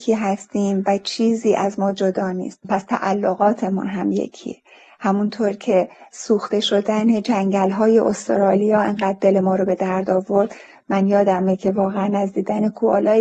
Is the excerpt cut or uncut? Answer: uncut